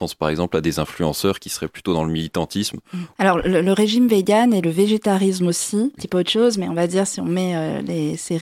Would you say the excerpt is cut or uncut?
cut